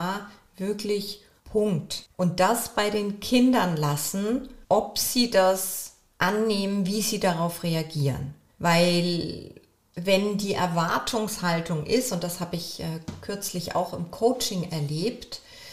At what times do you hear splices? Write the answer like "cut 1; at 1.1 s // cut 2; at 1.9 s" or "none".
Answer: cut 1; at 2.1 s